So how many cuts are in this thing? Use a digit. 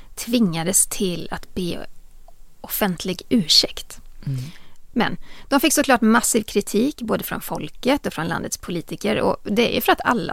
1